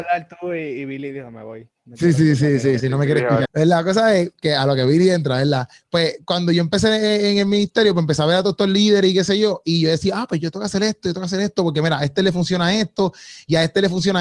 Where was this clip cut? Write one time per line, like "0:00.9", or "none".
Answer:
0:03.5